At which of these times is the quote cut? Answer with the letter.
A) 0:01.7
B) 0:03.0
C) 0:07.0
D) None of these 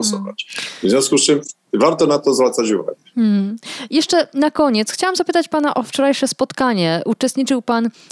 D